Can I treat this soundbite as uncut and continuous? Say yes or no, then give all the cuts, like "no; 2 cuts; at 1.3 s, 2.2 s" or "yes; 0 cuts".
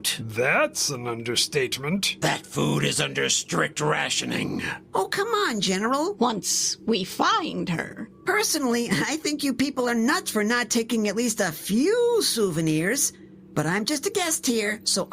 no; 1 cut; at 6.2 s